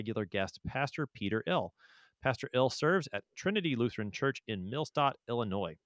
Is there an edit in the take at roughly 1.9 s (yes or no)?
no